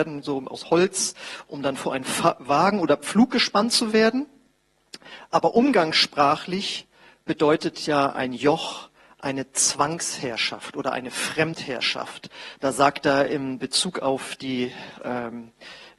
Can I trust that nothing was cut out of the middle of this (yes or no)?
no